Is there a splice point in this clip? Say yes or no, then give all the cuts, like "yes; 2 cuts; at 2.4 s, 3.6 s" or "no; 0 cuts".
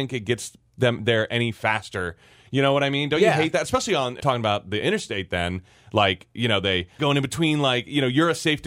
yes; 2 cuts; at 4.2 s, 7.0 s